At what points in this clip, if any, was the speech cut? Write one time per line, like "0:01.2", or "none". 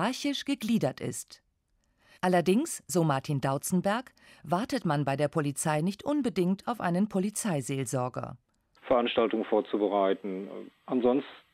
0:02.2
0:08.8